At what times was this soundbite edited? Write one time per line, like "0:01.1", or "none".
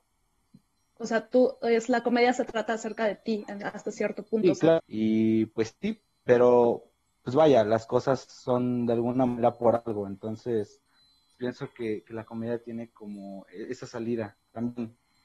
0:04.8
0:11.3